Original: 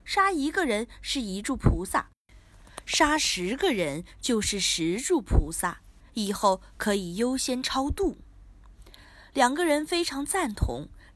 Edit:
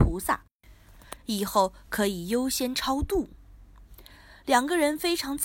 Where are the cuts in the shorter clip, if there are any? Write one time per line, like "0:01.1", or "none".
0:01.2